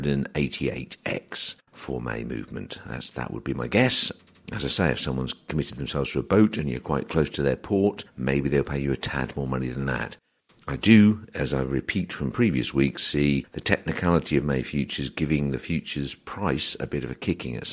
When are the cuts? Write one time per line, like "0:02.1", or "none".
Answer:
0:01.6